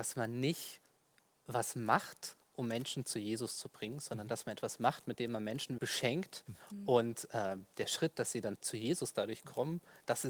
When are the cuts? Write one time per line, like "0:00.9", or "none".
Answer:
0:05.8